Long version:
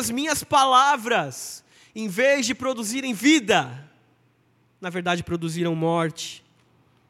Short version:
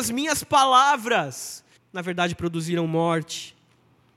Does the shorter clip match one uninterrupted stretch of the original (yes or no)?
no